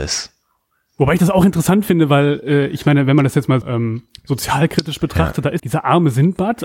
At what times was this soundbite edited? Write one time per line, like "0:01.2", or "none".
0:03.6
0:05.6